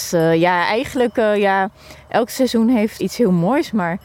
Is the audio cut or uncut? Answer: cut